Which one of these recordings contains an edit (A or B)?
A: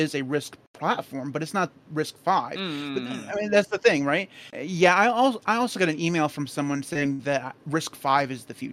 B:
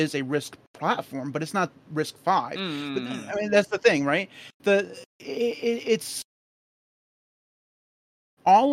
A